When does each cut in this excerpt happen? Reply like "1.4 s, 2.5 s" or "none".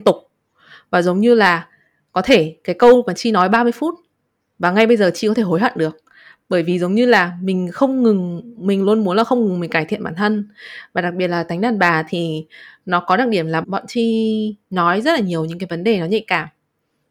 13.6 s